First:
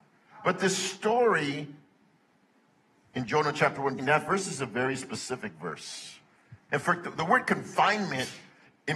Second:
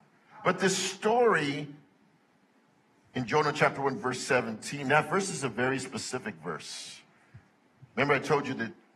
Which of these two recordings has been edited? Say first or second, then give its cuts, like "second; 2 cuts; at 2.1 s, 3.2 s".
first; 2 cuts; at 4.0 s, 6.7 s